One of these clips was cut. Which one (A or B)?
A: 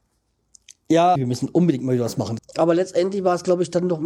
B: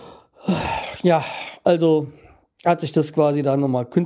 A